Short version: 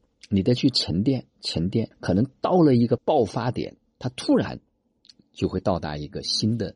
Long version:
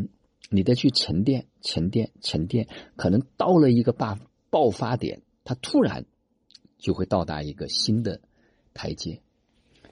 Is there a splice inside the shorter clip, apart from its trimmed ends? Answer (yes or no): yes